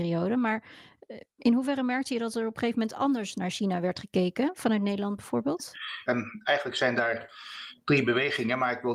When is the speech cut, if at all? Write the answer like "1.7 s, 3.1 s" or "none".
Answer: 6.1 s